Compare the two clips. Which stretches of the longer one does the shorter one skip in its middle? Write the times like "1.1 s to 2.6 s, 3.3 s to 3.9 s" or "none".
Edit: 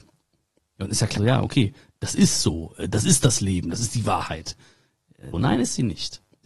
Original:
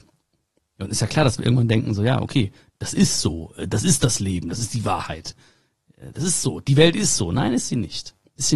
1.2 s to 2.0 s, 6.1 s to 7.3 s